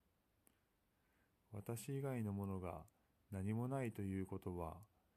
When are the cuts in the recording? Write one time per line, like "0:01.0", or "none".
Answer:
none